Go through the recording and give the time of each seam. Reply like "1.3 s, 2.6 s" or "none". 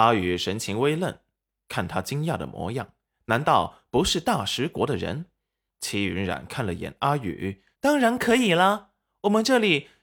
5.7 s, 7.7 s